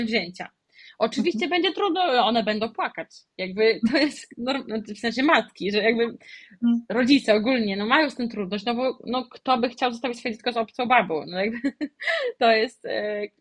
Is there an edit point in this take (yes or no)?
no